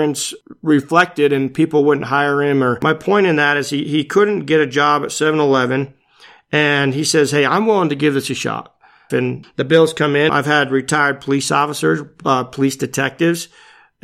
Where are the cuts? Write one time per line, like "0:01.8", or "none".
0:09.1
0:10.3